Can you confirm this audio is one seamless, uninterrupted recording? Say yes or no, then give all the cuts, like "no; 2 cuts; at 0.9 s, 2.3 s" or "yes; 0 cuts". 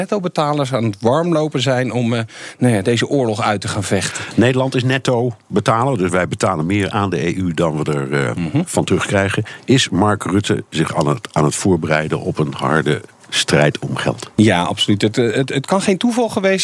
yes; 0 cuts